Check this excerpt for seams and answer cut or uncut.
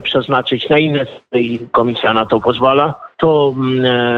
cut